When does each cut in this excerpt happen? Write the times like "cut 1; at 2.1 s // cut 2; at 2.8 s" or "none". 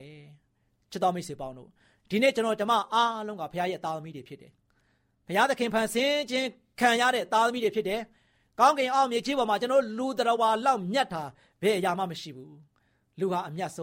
none

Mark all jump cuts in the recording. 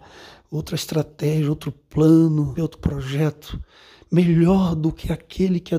cut 1; at 2.6 s

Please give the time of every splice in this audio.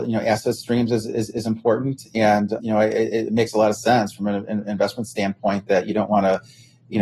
cut 1; at 2.6 s

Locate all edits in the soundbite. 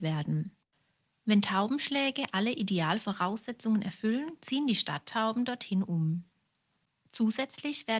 none

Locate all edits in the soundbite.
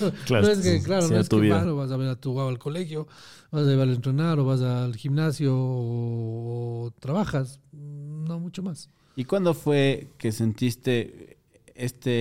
cut 1; at 1.6 s

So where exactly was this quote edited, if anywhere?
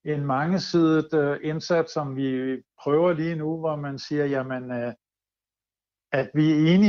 none

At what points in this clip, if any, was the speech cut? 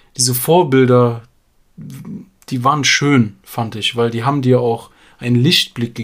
none

